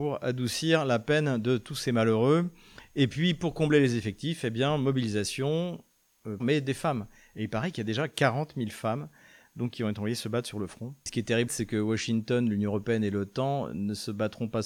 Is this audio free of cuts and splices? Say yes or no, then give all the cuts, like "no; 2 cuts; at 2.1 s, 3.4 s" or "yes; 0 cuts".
no; 2 cuts; at 6.4 s, 11.5 s